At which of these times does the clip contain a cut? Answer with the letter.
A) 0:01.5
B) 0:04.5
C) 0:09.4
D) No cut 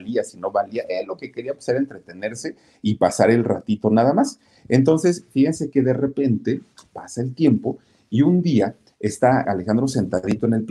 C